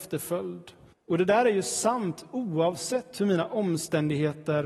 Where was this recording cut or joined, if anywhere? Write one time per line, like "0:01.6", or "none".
0:00.9

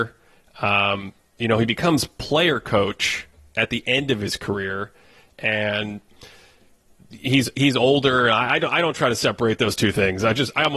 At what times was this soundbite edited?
none

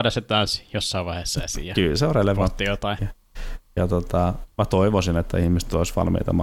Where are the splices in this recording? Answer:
0:03.0
0:04.5

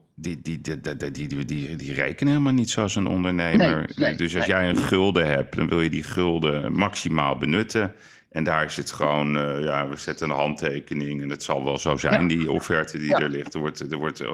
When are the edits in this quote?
none

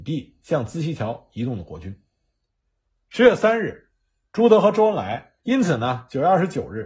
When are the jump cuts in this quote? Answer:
0:05.4

